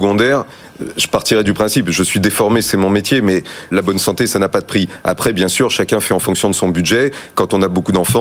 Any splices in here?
yes; 1 cut; at 3.7 s

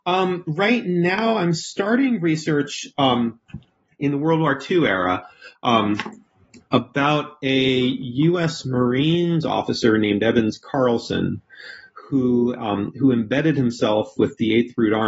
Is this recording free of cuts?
yes; 0 cuts

